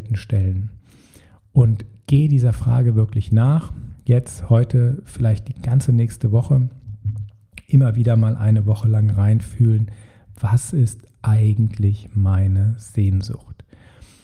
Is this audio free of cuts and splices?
yes; 0 cuts

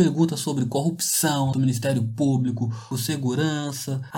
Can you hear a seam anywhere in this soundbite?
yes; 2 cuts; at 1.5 s, 2.9 s

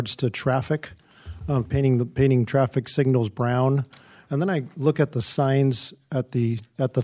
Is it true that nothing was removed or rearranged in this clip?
no; 1 cut; at 1.7 s

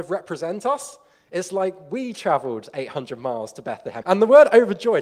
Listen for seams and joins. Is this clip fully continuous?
no; 1 cut; at 4.0 s

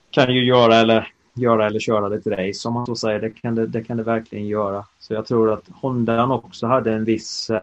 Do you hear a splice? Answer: no; 0 cuts

